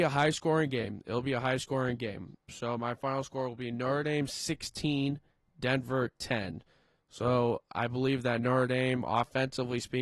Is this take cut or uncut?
uncut